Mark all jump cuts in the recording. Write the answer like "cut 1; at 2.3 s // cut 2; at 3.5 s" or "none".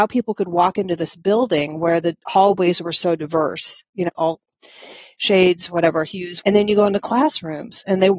cut 1; at 4.1 s // cut 2; at 6.4 s